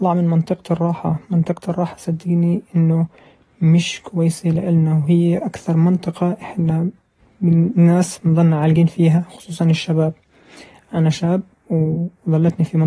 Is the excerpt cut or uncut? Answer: uncut